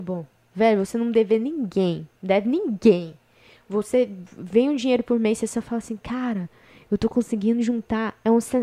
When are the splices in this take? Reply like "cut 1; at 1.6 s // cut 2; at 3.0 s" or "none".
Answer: cut 1; at 2.2 s